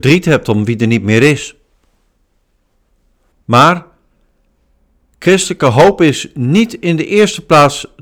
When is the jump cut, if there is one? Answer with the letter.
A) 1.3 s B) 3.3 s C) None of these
B